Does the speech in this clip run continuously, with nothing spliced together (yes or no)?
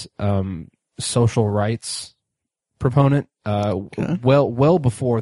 yes